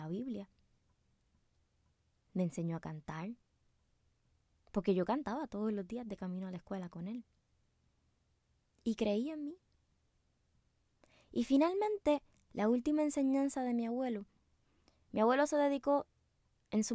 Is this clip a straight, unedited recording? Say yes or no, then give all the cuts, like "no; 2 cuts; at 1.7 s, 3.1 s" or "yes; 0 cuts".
yes; 0 cuts